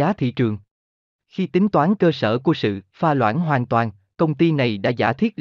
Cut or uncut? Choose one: cut